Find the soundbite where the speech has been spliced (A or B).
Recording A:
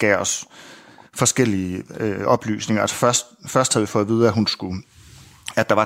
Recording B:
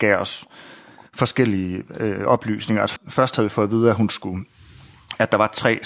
B